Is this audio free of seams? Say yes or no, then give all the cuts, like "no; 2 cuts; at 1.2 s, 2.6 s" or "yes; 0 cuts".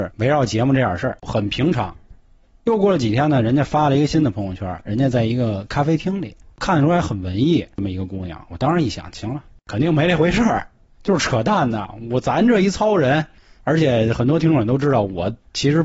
yes; 0 cuts